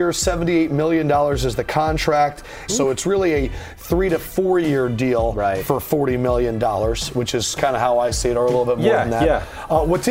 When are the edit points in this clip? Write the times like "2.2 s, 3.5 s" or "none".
2.7 s